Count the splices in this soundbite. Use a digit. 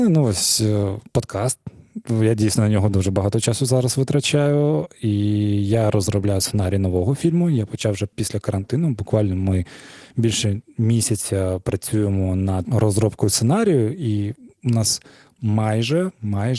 0